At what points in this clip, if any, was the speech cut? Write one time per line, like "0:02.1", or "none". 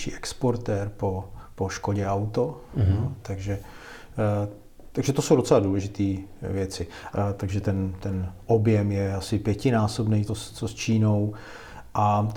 0:07.1
0:10.3